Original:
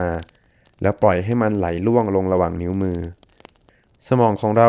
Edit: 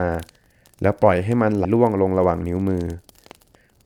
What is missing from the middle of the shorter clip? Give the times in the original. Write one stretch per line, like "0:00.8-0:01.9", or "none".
0:01.6-0:01.8